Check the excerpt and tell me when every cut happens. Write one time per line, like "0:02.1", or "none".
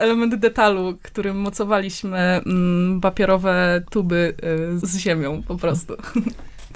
0:04.8